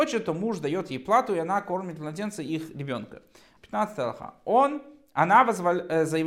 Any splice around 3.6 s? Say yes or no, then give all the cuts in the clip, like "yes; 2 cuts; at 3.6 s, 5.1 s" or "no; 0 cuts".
yes; 1 cut; at 3.6 s